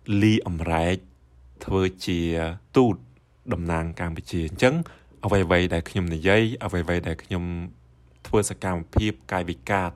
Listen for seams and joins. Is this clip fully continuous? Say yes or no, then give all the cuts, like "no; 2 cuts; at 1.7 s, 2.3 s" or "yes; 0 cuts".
yes; 0 cuts